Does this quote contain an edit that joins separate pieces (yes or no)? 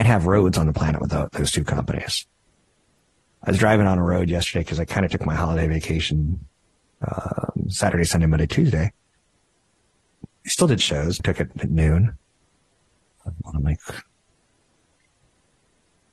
yes